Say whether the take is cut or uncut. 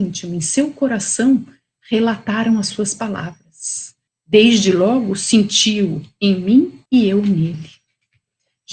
cut